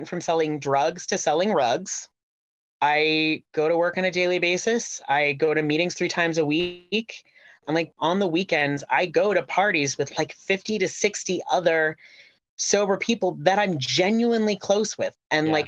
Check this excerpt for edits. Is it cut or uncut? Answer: cut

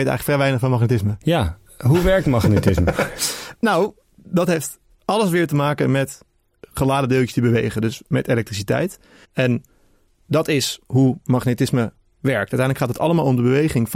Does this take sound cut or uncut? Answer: cut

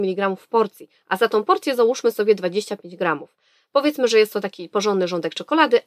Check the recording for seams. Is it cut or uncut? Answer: uncut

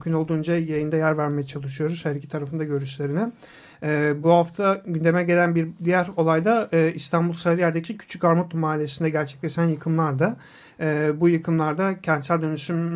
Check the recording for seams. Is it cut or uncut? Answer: uncut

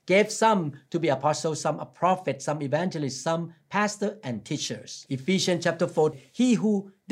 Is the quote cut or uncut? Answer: cut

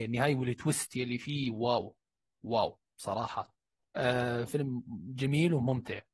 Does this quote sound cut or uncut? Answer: cut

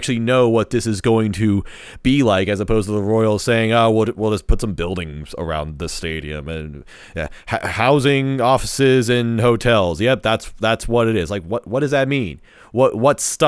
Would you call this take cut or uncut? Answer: uncut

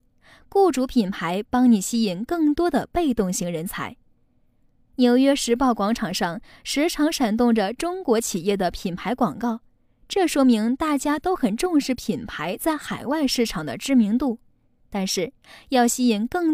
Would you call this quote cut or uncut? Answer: uncut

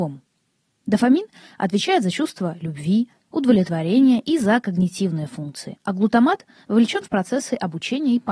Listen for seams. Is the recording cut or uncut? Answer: cut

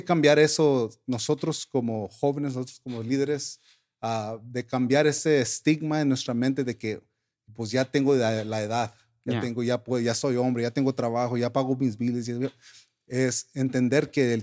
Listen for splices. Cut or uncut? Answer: uncut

